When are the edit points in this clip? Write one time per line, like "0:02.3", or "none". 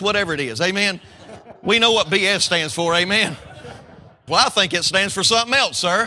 0:04.3

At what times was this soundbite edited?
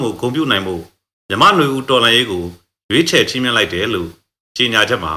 none

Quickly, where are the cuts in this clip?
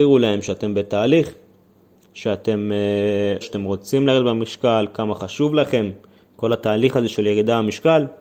0:03.4

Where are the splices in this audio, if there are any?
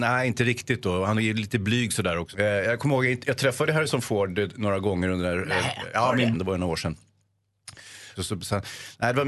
0:02.3
0:06.3
0:08.2

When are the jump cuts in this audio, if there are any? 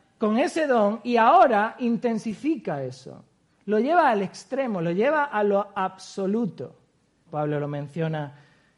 0:07.3

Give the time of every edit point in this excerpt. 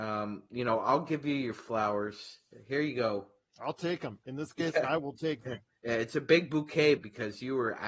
0:07.0

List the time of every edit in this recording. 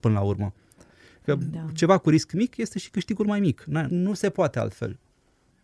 0:03.9

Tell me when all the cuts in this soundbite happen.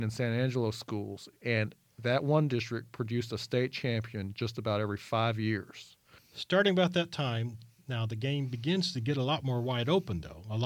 0:06.2

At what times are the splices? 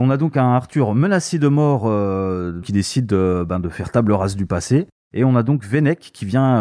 0:02.6

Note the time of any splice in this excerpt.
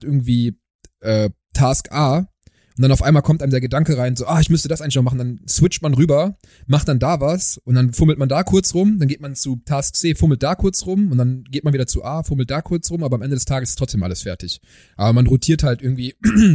none

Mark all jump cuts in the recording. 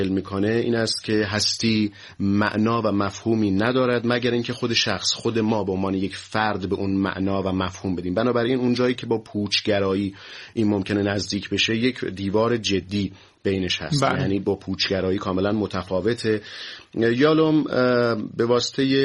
none

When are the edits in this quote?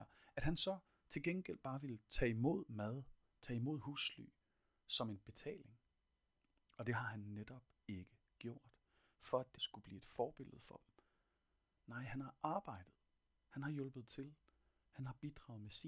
0:09.6

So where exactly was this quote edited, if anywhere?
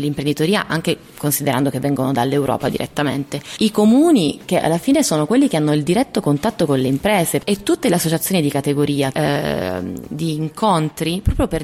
0:09.1

